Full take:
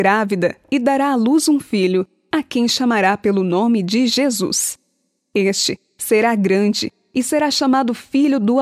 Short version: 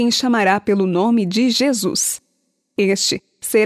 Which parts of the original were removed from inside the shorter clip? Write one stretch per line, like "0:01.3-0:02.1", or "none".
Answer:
none